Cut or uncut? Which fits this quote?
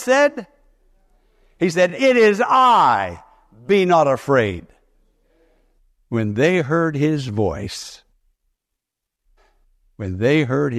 uncut